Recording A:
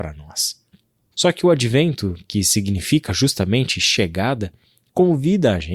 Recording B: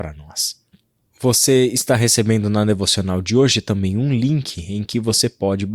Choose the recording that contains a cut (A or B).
A